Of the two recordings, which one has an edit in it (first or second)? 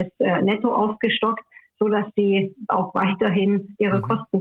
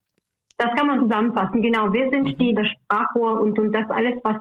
second